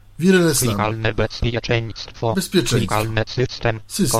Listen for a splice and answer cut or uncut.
uncut